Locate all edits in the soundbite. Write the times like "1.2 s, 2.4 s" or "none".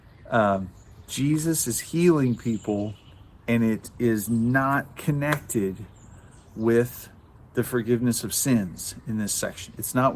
none